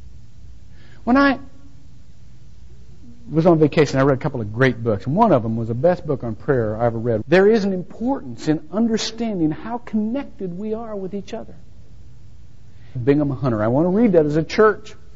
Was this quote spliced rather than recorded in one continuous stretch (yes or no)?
yes